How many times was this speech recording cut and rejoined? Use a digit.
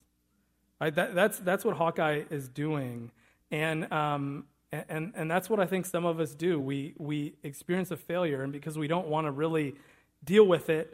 0